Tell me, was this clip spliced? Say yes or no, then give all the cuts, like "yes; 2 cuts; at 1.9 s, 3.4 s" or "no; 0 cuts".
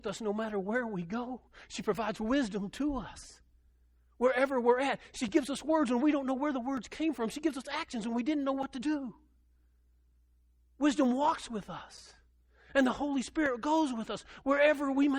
no; 0 cuts